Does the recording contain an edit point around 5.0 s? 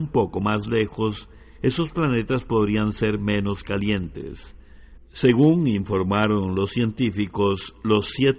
yes; 1 cut; at 5.0 s

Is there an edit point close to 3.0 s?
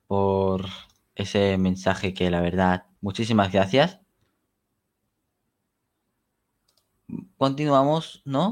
yes; 1 cut; at 3.0 s

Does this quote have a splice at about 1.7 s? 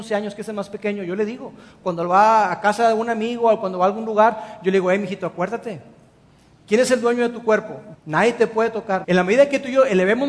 no; 2 cuts; at 7.9 s, 9.0 s

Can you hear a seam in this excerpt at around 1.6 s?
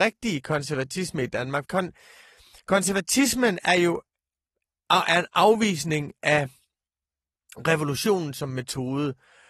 yes; 1 cut; at 1.6 s

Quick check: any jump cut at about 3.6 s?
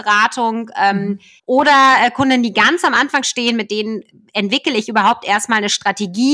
no; 1 cut; at 1.4 s

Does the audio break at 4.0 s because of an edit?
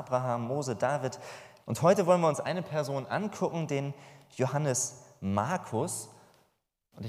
no; 1 cut; at 1.6 s

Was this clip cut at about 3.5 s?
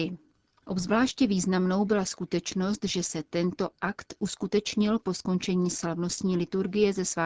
no; 0 cuts

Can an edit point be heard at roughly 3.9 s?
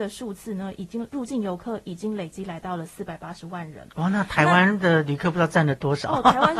no; 1 cut; at 1.1 s

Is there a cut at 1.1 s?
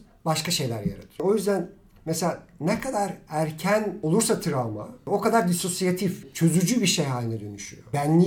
no; 0 cuts

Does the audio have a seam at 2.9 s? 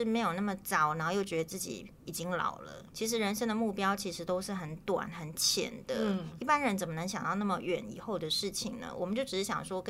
yes; 1 cut; at 2.9 s

